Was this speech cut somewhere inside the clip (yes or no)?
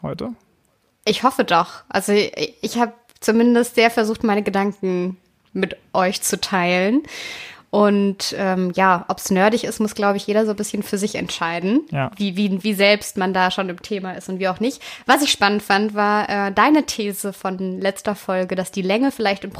yes